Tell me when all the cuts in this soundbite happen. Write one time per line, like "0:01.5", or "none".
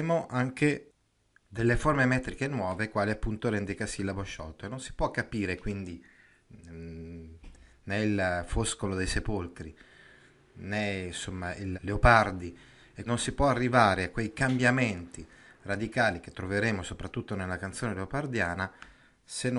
0:11.7
0:13.1